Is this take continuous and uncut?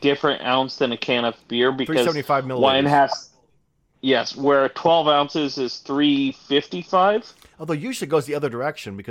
yes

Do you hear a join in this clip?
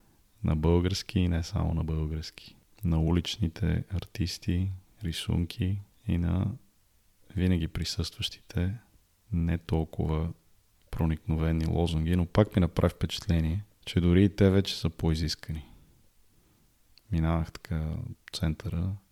no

